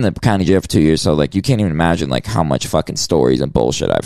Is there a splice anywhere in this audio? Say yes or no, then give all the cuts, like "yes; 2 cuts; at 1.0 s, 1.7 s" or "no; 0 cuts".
no; 0 cuts